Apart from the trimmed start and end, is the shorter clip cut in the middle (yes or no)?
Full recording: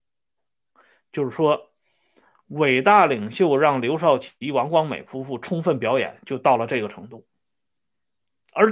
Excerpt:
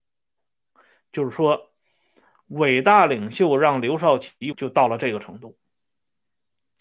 yes